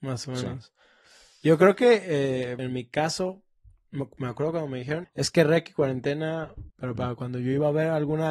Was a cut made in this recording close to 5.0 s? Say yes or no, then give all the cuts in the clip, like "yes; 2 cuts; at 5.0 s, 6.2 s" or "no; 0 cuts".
yes; 3 cuts; at 2.6 s, 5.0 s, 6.7 s